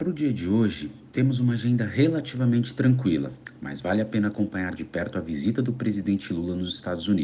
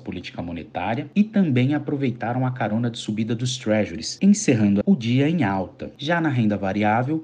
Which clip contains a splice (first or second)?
second